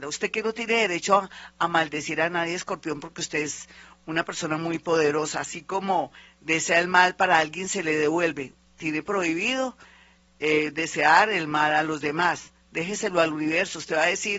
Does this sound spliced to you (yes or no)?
no